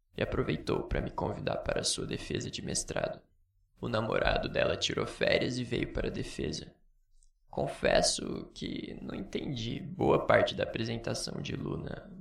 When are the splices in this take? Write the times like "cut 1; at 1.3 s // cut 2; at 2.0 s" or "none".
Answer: none

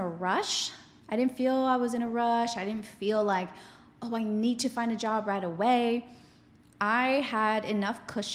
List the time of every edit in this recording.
none

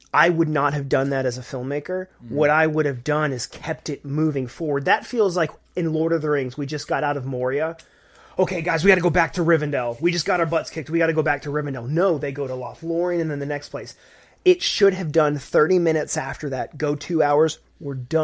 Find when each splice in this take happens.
none

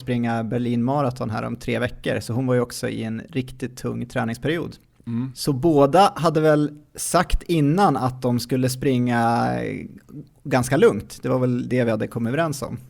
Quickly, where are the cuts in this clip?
none

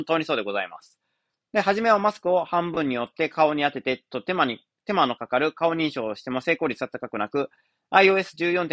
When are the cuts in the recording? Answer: none

